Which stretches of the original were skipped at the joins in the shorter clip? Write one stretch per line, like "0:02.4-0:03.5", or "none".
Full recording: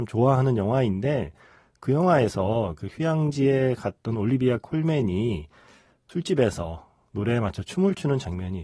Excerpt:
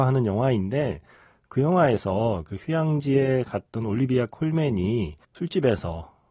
0:05.6-0:06.0